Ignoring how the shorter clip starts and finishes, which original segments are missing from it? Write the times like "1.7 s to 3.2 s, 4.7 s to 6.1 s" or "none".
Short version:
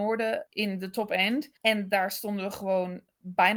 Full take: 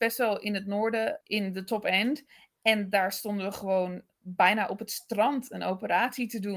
2.3 s to 2.6 s